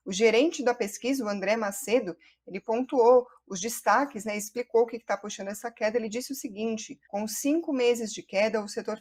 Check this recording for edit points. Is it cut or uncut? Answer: cut